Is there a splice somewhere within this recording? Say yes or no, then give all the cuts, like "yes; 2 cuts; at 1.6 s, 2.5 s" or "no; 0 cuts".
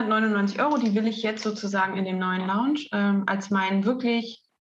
no; 0 cuts